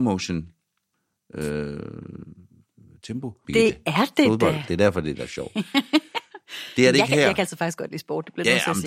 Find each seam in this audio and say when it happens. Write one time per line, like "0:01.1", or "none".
0:03.4

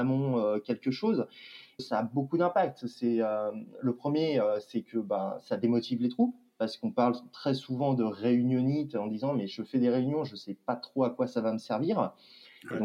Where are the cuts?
0:01.8

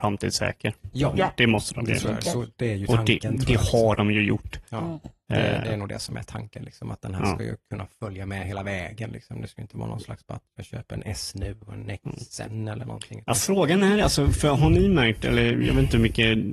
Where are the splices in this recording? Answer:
none

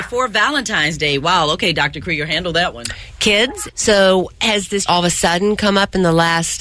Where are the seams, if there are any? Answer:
0:03.7
0:04.9

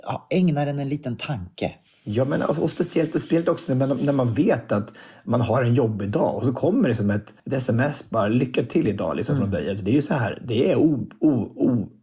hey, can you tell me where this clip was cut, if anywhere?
0:07.4

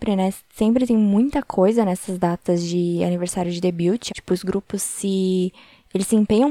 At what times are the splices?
0:04.1

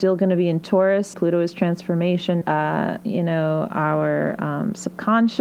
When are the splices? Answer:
0:01.1
0:02.4

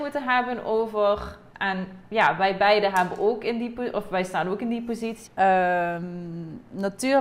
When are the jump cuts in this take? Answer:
0:05.3

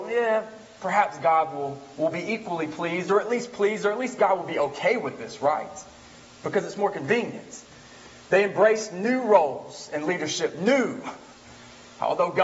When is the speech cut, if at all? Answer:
none

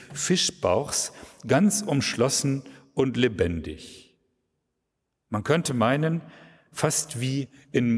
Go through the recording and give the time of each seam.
none

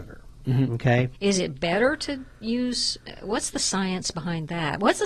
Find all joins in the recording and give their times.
0:01.1

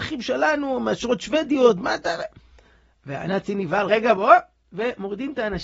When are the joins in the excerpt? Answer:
0:03.9

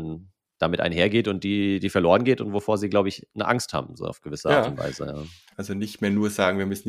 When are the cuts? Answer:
0:05.5

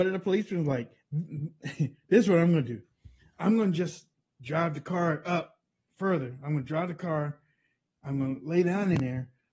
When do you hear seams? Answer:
none

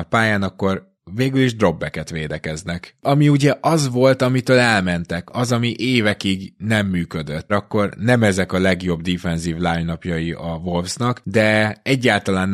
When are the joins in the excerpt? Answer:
0:07.5

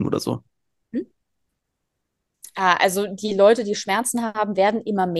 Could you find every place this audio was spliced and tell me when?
none

